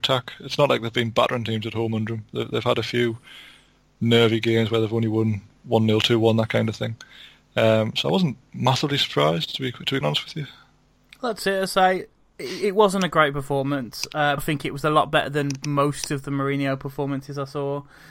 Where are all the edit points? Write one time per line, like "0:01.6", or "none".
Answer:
0:10.0
0:14.4